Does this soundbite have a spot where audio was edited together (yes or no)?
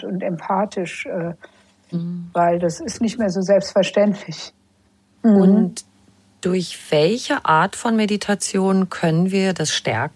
yes